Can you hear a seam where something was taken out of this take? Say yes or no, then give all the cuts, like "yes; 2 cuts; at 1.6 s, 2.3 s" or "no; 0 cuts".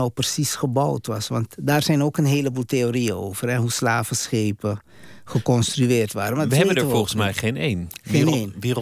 no; 0 cuts